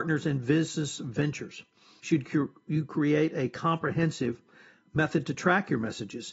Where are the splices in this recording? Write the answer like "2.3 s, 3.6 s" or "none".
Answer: 2.0 s